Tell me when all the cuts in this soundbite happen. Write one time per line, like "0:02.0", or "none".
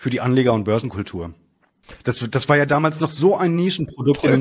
0:02.0